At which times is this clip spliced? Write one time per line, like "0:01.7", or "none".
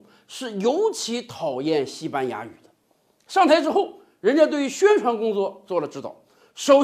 none